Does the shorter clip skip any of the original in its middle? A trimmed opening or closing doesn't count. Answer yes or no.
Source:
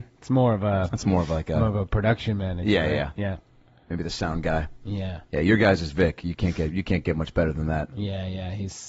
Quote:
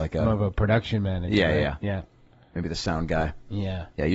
no